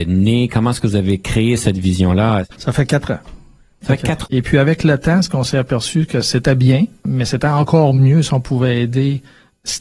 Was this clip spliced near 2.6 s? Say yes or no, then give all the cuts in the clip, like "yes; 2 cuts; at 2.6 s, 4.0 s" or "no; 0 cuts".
yes; 2 cuts; at 2.6 s, 4.3 s